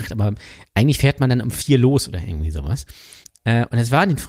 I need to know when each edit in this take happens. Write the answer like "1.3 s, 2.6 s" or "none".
none